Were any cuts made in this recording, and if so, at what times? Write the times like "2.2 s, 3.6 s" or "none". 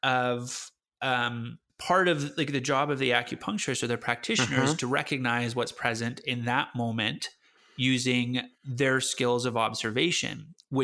none